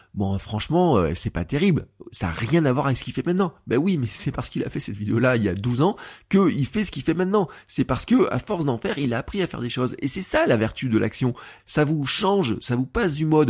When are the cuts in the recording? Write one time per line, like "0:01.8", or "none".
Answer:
0:11.6